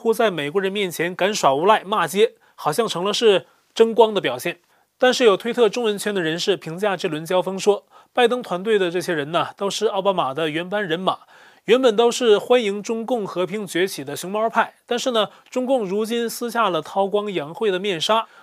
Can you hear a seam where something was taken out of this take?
no; 0 cuts

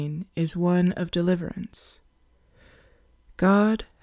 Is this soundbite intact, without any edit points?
yes; 0 cuts

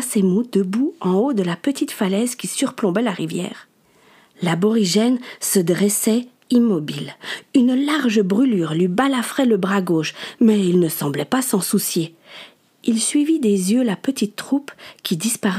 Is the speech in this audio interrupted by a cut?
no; 0 cuts

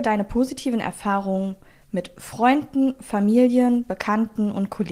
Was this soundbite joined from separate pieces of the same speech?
no; 0 cuts

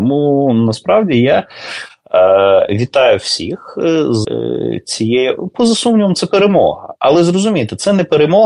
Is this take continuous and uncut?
no; 1 cut; at 4.2 s

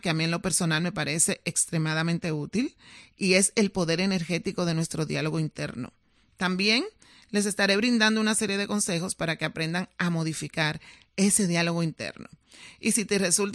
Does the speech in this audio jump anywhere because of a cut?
no; 0 cuts

